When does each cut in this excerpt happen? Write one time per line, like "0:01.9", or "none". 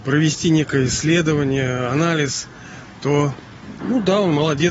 0:03.8